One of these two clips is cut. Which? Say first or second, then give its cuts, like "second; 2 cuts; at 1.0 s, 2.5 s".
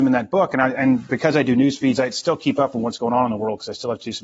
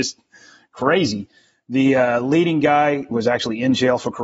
second; 1 cut; at 3.1 s